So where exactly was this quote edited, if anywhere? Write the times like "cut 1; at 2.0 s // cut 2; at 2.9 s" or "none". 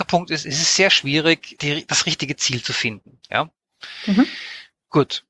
cut 1; at 1.6 s